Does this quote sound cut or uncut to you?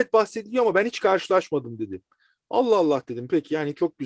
uncut